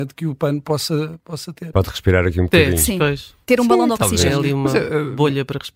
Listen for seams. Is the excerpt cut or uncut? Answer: cut